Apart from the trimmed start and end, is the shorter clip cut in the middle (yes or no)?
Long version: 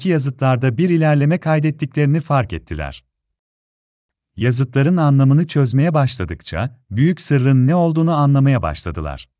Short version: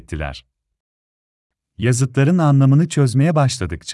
no